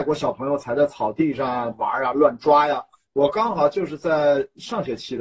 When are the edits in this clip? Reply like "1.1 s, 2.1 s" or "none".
1.7 s